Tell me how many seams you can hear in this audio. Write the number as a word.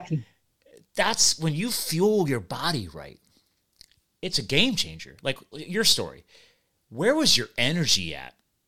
one